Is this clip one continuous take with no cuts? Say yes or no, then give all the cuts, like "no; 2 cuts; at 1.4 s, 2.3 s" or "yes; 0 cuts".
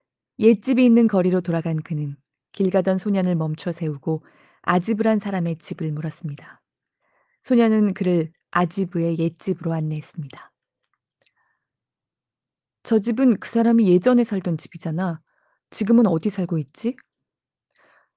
yes; 0 cuts